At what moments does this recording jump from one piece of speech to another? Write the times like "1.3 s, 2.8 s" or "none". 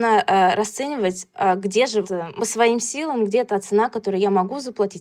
2.0 s